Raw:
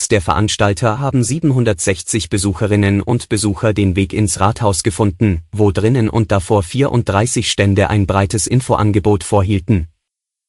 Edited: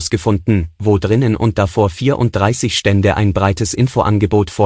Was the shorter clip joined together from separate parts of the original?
no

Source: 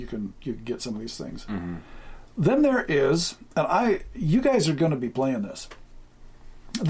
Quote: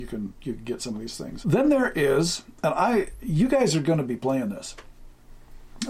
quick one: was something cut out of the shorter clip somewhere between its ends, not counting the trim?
yes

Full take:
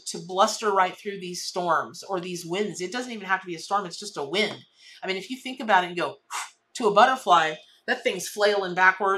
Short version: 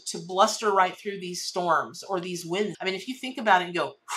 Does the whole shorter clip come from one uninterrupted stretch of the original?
no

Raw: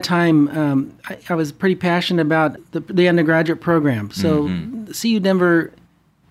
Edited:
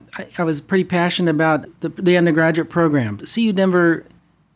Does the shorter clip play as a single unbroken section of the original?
no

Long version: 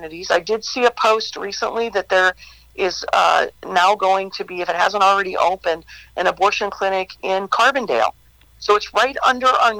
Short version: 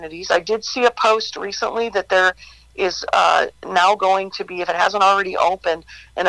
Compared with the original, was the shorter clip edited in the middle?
no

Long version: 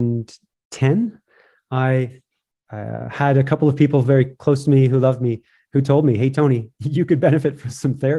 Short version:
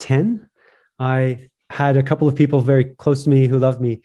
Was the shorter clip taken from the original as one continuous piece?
no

